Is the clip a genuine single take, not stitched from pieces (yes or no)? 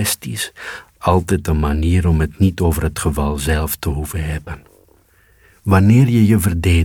yes